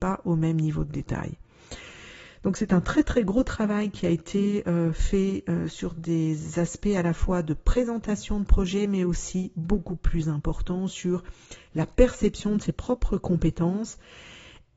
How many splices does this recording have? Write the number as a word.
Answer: zero